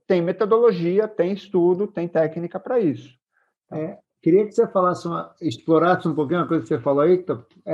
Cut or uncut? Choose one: uncut